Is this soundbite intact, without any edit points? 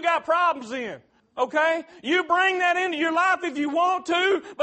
no; 1 cut; at 1.2 s

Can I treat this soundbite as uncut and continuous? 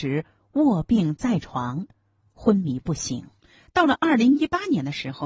yes; 0 cuts

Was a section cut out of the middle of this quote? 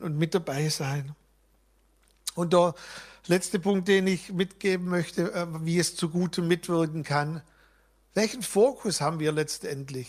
no; 0 cuts

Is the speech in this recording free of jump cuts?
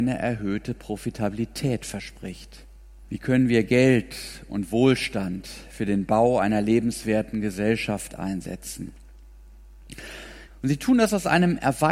no; 2 cuts; at 3.0 s, 10.5 s

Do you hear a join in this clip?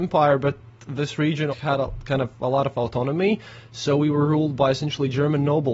yes; 1 cut; at 1.5 s

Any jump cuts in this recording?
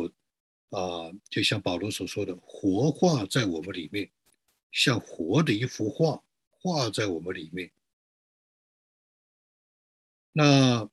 no; 0 cuts

